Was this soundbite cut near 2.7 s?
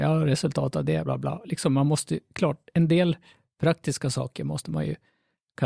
no; 1 cut; at 1.0 s

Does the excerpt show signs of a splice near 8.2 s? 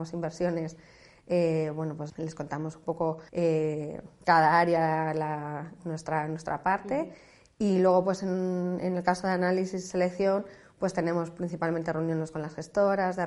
no; 2 cuts; at 2.1 s, 3.3 s

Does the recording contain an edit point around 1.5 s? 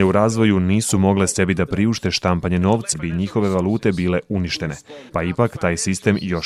no; 2 cuts; at 2.9 s, 5.1 s

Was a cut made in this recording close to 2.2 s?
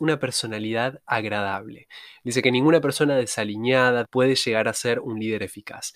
no; 1 cut; at 4.0 s

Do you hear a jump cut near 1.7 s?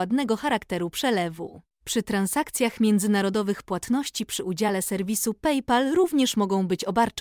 yes; 1 cut; at 1.7 s

